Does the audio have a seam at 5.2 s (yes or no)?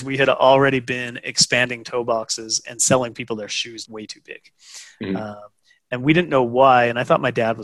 no